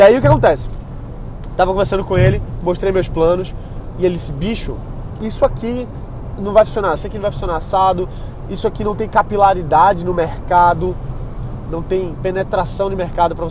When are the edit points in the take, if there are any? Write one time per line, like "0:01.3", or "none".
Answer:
0:07.0